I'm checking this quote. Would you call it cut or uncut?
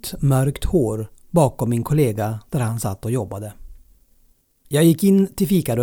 cut